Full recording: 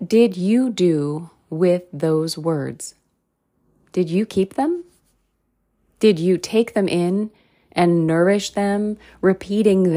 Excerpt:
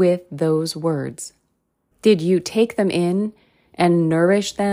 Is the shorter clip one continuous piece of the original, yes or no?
no